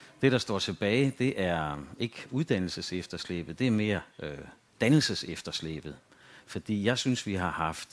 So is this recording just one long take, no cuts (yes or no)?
yes